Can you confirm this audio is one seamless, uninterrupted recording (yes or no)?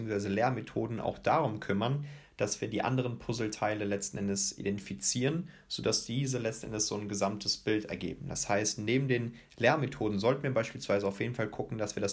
yes